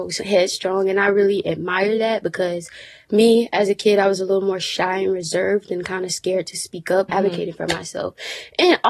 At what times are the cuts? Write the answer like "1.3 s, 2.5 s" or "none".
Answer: 7.1 s

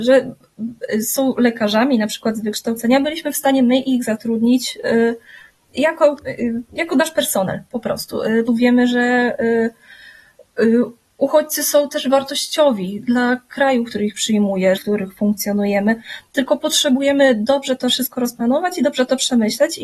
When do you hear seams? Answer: 8.5 s, 14.8 s

